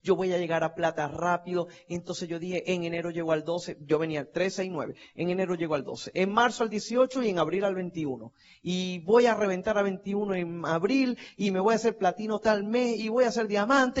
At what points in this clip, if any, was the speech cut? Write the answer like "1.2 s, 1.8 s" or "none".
6.1 s